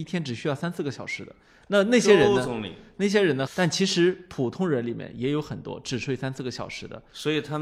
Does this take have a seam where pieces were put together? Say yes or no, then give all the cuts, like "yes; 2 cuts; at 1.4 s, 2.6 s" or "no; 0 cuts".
yes; 1 cut; at 3.5 s